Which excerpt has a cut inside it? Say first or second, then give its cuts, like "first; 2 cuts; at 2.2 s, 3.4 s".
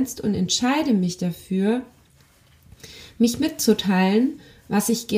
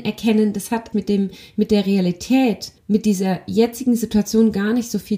second; 2 cuts; at 0.9 s, 2.8 s